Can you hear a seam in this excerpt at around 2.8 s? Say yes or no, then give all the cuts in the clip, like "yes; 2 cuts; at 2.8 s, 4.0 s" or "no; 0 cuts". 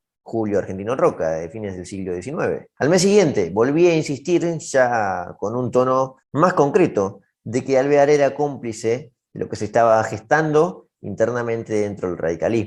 yes; 2 cuts; at 2.8 s, 6.2 s